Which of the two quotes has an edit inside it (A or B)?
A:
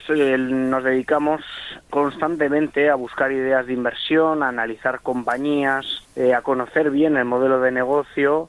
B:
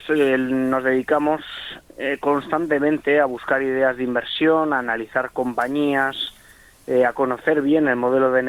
A